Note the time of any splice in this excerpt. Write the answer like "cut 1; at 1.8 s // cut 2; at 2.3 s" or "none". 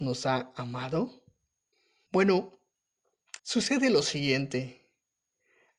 cut 1; at 2.1 s // cut 2; at 3.4 s